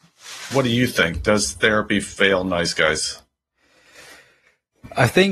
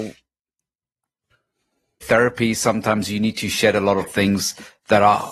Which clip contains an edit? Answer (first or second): second